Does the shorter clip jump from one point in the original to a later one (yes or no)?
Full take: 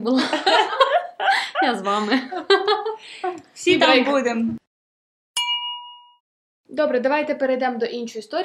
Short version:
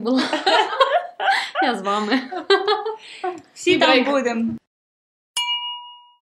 no